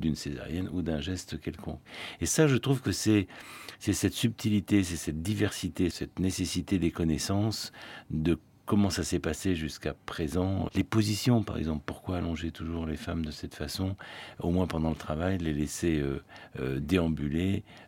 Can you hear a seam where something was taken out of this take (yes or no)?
yes